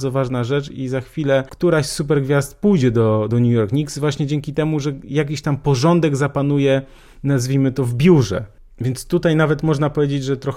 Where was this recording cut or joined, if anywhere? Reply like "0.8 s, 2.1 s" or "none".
3.3 s